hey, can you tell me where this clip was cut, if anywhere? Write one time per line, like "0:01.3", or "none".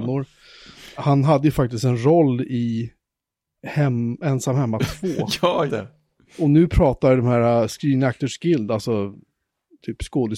0:05.7